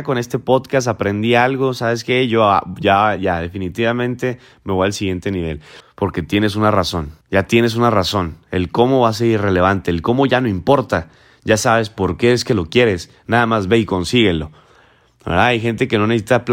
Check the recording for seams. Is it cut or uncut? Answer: cut